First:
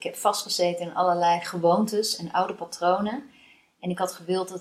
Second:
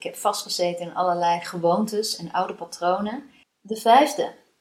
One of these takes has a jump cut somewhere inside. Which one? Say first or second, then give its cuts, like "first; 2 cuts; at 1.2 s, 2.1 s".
second; 1 cut; at 3.4 s